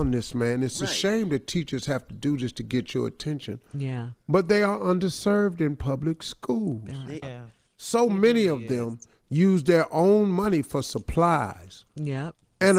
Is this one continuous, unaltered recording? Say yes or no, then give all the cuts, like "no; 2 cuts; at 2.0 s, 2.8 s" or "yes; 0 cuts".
no; 1 cut; at 7.2 s